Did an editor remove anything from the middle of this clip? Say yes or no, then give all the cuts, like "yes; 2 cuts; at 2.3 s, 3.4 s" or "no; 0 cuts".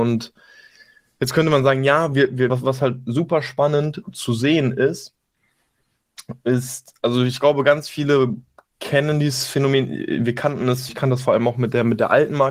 yes; 2 cuts; at 2.5 s, 10.9 s